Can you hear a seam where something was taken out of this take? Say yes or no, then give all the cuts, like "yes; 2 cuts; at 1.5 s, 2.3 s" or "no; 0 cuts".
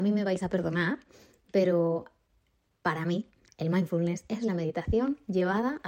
no; 0 cuts